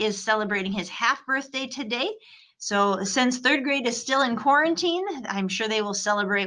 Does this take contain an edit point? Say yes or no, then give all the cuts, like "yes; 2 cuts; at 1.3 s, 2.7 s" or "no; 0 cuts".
no; 0 cuts